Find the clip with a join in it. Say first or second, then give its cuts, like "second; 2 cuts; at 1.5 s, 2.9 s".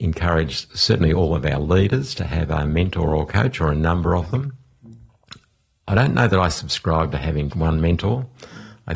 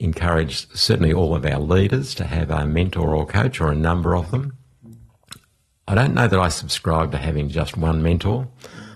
first; 1 cut; at 7.5 s